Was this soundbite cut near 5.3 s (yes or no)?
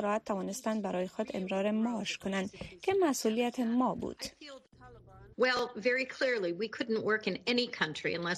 yes